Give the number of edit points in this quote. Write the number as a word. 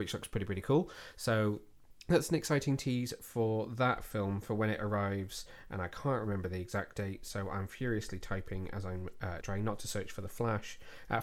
two